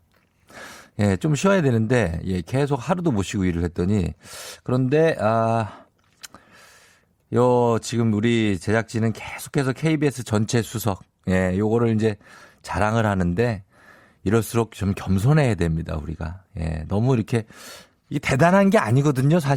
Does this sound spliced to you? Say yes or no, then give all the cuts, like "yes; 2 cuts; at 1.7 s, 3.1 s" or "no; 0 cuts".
no; 0 cuts